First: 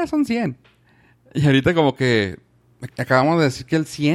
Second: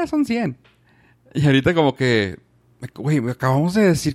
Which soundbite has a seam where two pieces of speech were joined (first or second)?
first